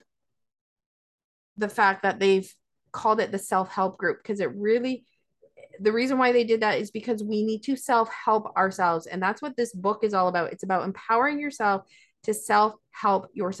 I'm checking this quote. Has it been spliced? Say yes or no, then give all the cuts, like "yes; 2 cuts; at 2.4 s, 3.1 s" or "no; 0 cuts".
no; 0 cuts